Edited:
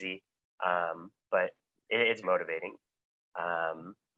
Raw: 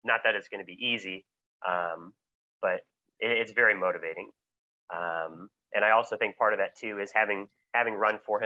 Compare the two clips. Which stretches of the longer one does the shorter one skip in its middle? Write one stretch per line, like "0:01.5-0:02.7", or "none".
0:02.2-0:02.5
0:03.5-0:03.8